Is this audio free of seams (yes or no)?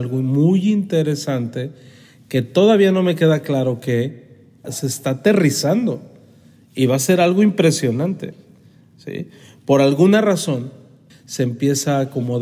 no